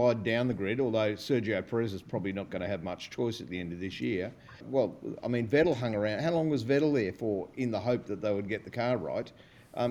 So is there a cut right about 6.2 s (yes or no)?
no